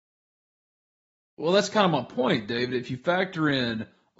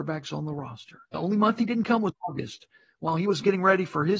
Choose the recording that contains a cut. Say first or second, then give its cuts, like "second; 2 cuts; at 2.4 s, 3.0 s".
second; 1 cut; at 1.1 s